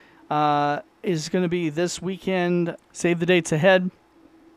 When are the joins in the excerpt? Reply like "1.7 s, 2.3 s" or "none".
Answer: 2.8 s